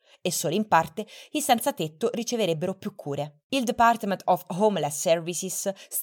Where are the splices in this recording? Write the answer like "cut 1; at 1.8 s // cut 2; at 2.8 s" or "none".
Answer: cut 1; at 3.4 s